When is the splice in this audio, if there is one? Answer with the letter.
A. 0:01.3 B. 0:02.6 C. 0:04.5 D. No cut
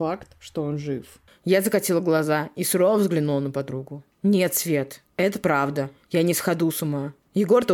A